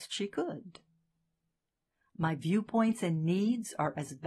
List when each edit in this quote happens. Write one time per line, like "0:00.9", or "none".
0:02.1